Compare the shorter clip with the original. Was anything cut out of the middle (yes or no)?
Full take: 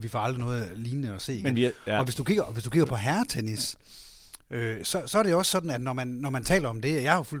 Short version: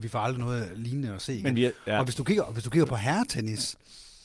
no